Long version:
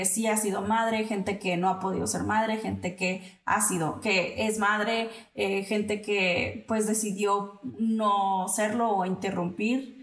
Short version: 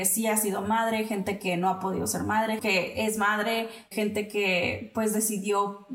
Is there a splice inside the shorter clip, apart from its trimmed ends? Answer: yes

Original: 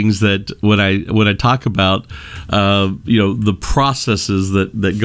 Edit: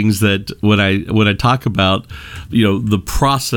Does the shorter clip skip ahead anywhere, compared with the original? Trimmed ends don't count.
yes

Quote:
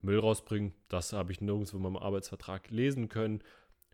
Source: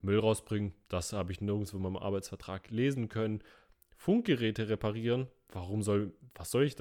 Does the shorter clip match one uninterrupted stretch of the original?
yes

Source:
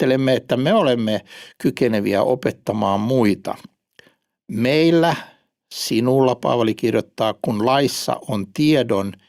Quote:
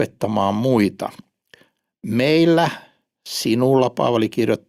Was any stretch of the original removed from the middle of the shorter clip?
no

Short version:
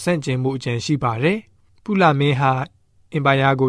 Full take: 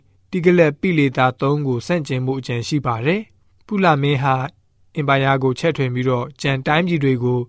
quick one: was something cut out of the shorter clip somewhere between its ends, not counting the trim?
no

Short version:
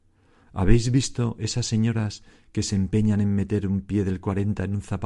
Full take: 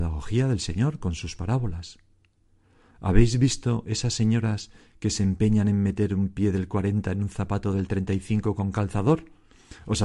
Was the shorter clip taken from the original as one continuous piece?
yes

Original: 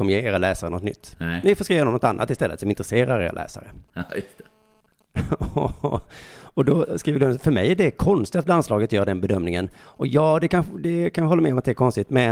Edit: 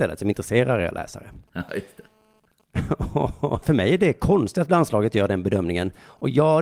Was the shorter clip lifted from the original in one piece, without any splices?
no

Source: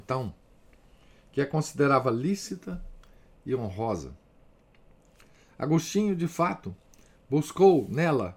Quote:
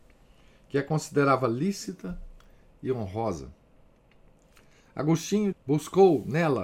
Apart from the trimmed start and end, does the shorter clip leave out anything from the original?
yes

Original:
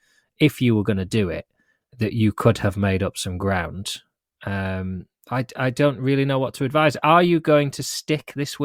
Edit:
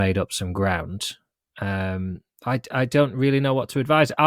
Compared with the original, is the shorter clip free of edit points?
yes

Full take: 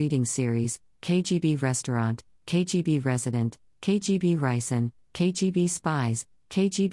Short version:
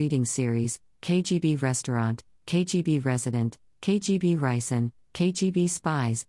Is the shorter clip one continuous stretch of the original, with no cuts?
yes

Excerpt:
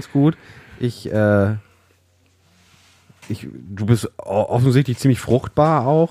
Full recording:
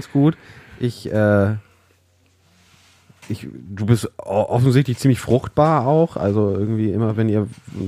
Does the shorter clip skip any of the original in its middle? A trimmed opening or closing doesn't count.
no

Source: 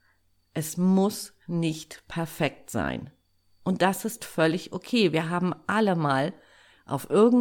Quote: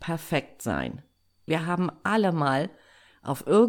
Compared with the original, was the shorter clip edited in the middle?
yes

